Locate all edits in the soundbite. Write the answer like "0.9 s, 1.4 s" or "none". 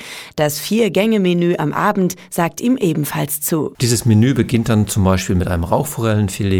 none